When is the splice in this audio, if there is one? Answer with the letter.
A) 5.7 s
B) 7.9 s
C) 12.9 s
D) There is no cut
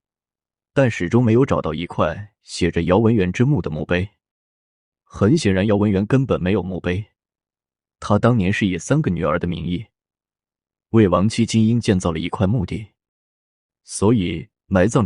D